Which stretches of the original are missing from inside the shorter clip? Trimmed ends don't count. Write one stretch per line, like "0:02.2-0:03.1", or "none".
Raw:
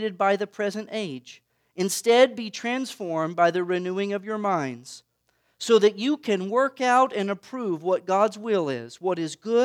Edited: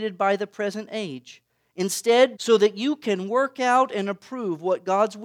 0:02.4-0:05.6